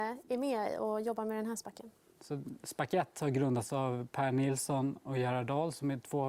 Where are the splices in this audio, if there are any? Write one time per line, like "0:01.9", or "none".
none